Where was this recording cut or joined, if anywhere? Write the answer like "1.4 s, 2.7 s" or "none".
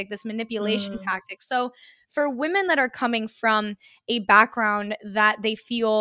none